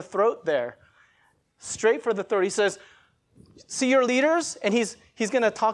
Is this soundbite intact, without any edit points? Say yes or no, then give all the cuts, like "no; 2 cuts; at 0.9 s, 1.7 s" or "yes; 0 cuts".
yes; 0 cuts